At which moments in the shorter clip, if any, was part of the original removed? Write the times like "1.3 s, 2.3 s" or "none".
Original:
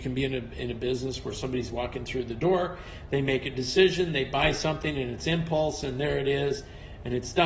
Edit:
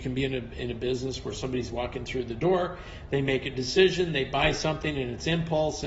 none